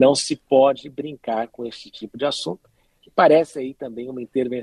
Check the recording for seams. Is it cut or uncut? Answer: uncut